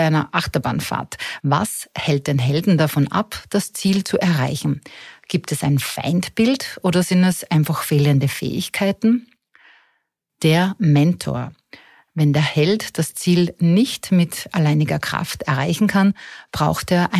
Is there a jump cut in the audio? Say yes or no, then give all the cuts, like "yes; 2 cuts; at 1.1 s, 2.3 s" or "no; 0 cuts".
yes; 1 cut; at 1.4 s